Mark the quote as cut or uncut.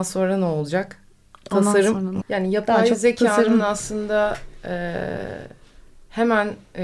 cut